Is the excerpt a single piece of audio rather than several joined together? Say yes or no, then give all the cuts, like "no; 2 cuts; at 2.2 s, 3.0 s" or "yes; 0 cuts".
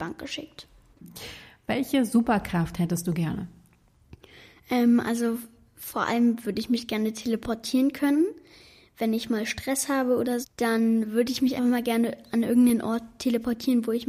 no; 2 cuts; at 10.4 s, 11.6 s